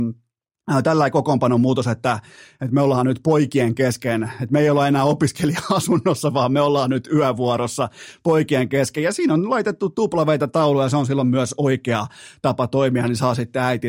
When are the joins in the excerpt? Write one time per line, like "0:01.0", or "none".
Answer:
none